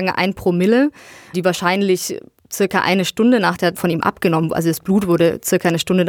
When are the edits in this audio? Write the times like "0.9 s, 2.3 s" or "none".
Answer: 1.3 s, 3.7 s